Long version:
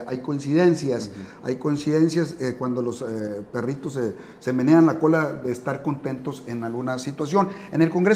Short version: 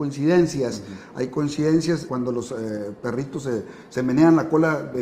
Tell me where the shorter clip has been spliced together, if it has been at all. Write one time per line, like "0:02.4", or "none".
0:02.1